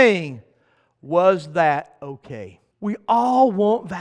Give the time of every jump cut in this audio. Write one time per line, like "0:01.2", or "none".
0:02.7